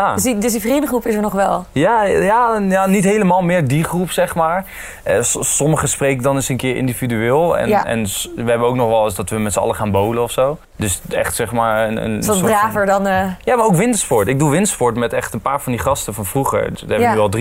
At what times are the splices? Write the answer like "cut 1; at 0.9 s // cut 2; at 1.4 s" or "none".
cut 1; at 10.6 s